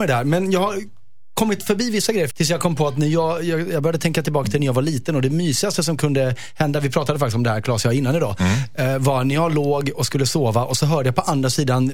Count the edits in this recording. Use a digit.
1